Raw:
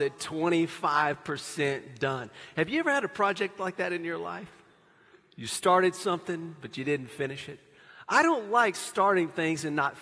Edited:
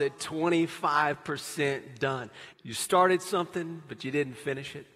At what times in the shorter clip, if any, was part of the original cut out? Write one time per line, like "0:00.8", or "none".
0:02.5